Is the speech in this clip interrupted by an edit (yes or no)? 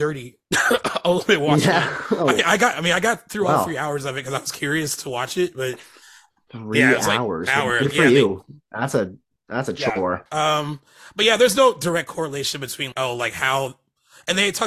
yes